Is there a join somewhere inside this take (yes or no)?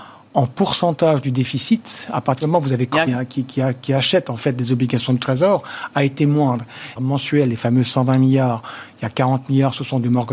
yes